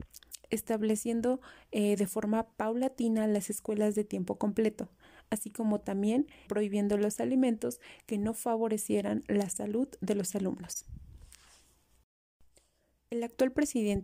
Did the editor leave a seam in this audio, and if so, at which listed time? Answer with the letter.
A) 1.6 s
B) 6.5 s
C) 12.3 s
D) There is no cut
B